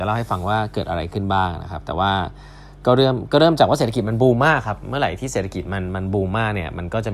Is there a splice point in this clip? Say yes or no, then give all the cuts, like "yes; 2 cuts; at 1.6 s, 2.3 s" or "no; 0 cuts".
no; 0 cuts